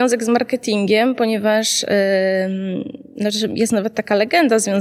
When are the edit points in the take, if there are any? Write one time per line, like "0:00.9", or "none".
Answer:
none

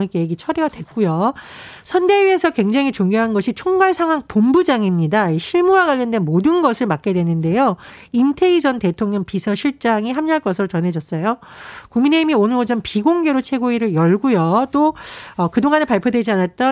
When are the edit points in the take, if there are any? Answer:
none

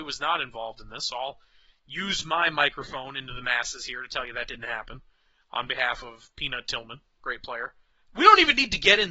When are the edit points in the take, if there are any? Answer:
0:08.1

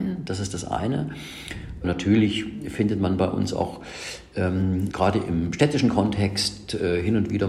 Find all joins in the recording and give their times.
0:01.8
0:04.9

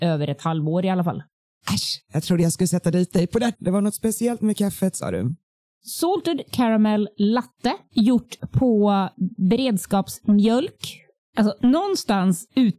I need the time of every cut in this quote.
0:03.6
0:11.2

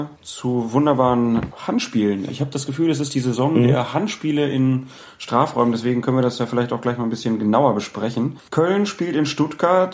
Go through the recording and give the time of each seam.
none

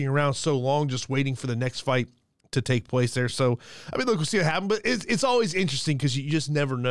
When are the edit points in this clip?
none

